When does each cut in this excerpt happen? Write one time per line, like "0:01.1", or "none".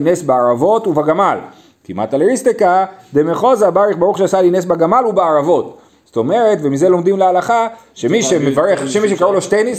none